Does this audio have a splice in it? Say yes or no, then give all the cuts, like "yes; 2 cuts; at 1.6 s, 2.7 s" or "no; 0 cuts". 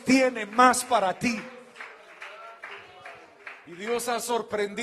no; 0 cuts